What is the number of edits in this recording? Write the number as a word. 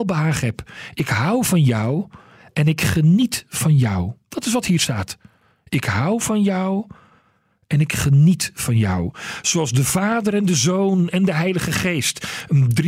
zero